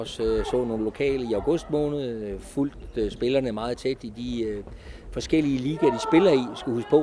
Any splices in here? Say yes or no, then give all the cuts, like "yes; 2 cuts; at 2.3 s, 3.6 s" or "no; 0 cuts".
no; 0 cuts